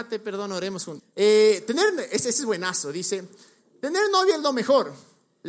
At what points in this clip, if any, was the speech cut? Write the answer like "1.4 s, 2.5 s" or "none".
1.0 s